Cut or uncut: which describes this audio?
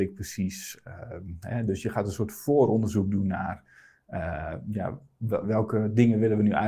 cut